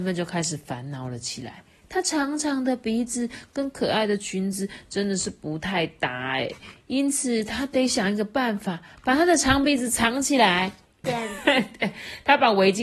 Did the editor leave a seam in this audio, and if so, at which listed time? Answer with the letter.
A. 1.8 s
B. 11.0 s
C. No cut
B